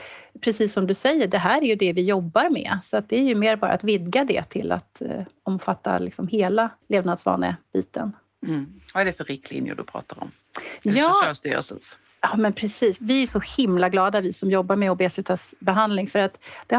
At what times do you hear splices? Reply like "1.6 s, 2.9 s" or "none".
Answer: 6.8 s